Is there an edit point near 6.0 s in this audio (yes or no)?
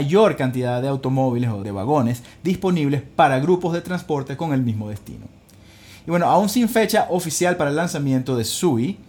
no